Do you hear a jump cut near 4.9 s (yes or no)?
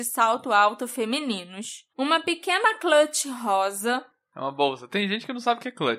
no